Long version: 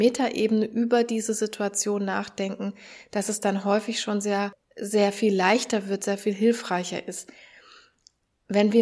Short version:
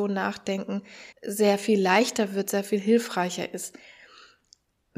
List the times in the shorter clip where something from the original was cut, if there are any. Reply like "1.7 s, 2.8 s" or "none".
1.1 s